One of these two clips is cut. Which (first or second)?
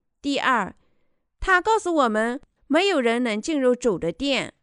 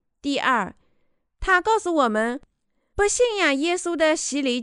first